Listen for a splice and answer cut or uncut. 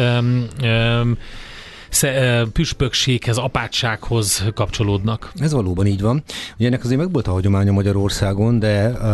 uncut